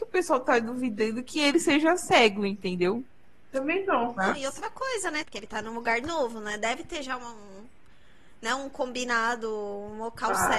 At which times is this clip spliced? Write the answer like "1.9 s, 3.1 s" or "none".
5.2 s